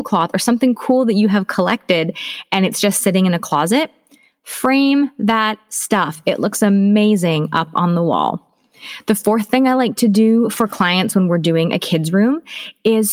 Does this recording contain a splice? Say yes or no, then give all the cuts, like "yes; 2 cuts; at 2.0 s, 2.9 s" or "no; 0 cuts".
no; 0 cuts